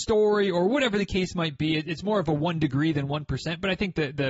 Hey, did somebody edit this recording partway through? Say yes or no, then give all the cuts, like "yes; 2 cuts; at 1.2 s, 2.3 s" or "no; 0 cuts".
no; 0 cuts